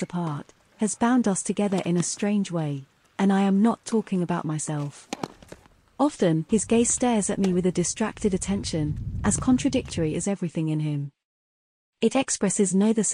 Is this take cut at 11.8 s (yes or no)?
no